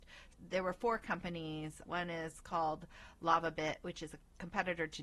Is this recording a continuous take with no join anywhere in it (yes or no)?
no